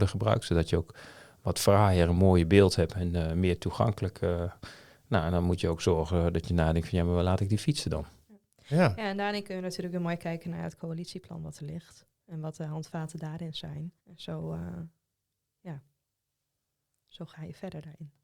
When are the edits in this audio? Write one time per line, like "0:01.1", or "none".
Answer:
0:14.0